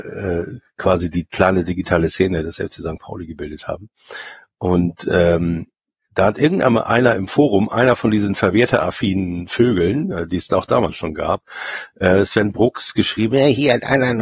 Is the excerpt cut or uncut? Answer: uncut